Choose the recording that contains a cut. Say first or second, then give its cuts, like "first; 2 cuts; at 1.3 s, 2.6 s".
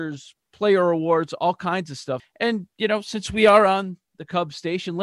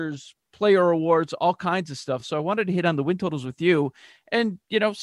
first; 1 cut; at 2.2 s